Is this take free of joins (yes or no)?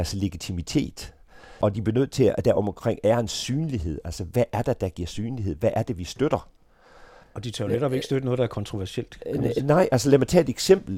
yes